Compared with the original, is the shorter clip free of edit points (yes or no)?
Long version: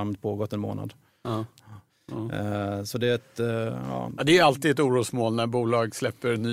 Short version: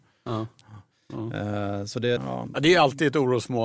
no